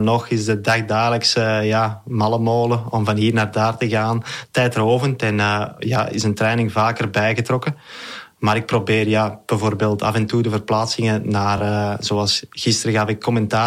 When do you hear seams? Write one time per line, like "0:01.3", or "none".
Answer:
none